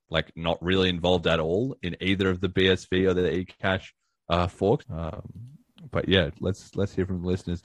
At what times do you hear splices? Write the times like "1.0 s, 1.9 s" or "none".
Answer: 4.8 s, 6.3 s